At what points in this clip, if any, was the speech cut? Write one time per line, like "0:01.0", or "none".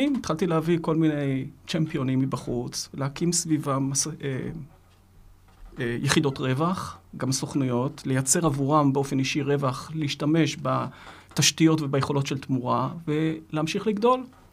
none